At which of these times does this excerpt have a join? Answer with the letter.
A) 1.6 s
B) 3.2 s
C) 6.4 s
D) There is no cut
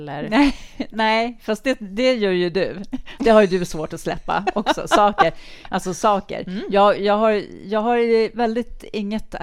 D